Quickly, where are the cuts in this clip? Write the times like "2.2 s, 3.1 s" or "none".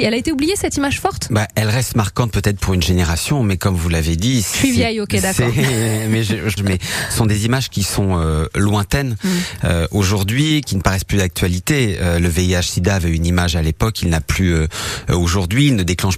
6.6 s